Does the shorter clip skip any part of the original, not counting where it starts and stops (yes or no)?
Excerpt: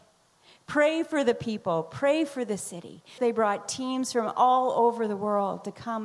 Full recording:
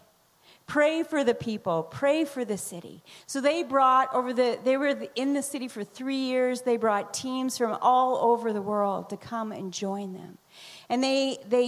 yes